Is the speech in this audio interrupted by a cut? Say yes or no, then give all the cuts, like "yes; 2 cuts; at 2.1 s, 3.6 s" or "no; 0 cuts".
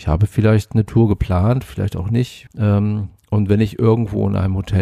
yes; 1 cut; at 2.5 s